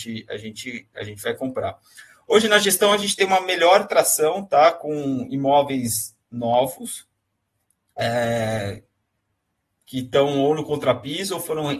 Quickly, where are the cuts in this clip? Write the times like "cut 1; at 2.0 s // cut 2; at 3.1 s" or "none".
none